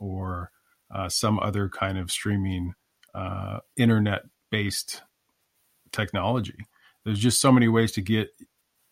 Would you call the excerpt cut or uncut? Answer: uncut